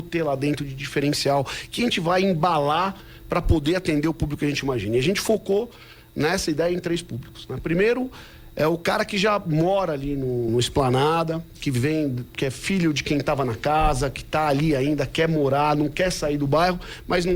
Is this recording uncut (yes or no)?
no